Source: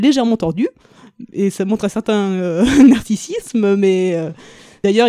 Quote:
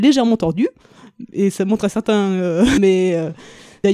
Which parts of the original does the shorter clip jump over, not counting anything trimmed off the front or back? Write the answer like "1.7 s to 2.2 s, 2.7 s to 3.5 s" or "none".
2.8 s to 3.8 s